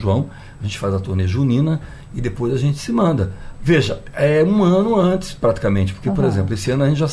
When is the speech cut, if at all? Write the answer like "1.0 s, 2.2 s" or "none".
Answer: 3.5 s